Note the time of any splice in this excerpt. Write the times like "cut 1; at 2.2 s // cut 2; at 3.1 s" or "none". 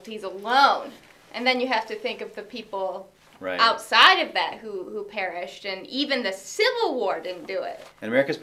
none